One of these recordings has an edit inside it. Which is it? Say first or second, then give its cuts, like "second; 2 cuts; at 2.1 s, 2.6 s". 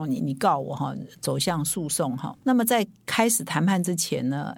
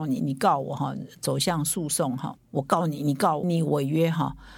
second; 2 cuts; at 2.4 s, 3.4 s